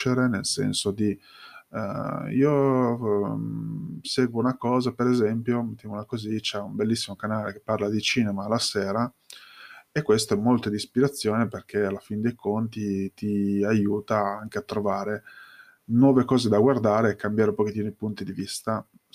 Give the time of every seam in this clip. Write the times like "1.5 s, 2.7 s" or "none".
none